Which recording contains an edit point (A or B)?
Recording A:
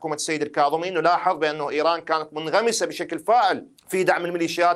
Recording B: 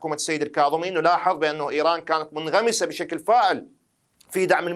A